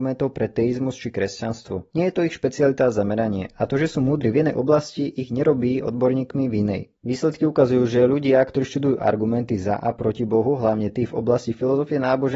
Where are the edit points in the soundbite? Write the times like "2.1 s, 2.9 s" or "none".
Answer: none